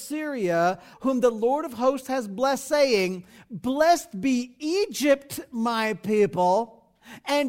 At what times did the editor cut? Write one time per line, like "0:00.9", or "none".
0:00.9